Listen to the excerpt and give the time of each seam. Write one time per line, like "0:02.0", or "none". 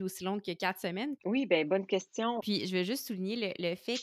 0:01.2
0:02.4